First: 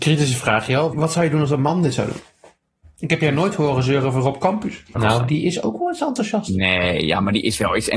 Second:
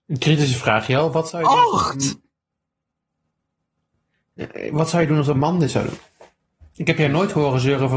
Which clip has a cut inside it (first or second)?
first